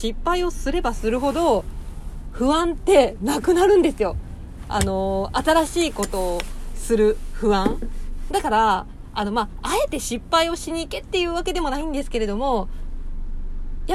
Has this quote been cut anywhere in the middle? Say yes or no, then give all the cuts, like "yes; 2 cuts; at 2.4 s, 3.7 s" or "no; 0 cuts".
yes; 1 cut; at 8.3 s